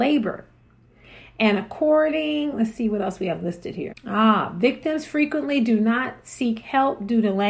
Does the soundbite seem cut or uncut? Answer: cut